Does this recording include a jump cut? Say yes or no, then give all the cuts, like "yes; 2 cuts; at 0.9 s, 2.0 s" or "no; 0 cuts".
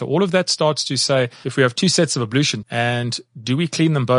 yes; 1 cut; at 2.6 s